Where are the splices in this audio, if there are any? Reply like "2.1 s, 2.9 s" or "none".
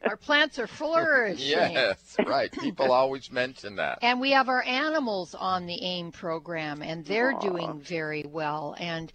none